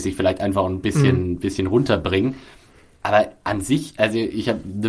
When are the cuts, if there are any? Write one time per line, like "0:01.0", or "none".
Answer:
none